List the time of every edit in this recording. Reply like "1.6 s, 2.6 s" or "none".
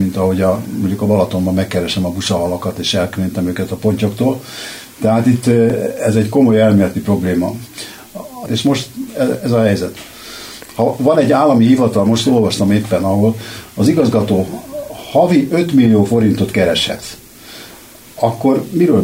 8.5 s